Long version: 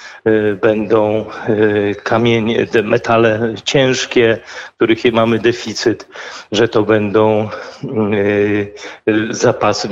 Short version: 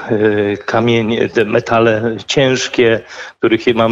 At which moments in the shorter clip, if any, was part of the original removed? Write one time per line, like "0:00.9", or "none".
none